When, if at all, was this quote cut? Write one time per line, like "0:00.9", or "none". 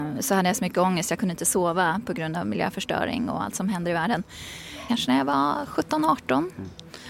0:04.9